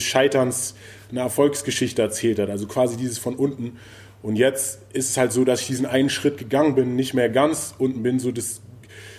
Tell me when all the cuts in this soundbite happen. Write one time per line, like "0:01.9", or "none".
none